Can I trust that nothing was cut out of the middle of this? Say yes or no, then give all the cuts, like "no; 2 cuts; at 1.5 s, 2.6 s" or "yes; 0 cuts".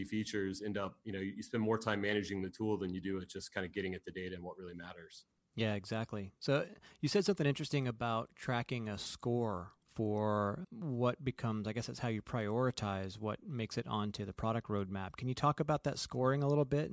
no; 1 cut; at 10.6 s